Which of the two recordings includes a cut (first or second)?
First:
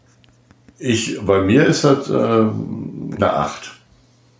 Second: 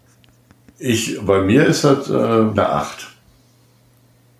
second